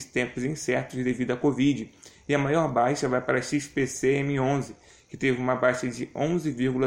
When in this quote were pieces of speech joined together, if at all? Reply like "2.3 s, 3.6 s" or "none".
none